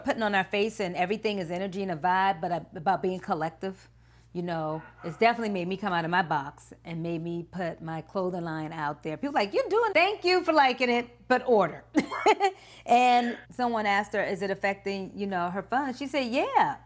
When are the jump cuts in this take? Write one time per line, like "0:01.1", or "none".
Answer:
0:09.9
0:13.4